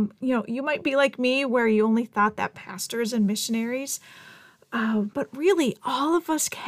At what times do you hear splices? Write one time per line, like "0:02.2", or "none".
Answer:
0:05.1